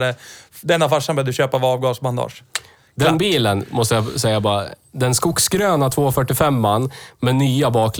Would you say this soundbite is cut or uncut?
uncut